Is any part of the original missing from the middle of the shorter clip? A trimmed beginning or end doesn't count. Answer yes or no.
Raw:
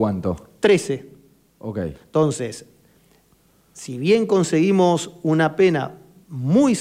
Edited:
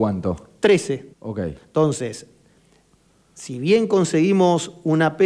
yes